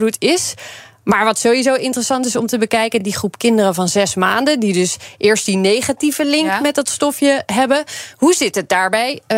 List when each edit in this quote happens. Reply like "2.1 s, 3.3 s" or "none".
none